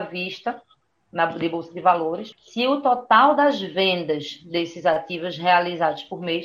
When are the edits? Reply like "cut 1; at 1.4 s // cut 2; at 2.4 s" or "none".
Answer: cut 1; at 2.3 s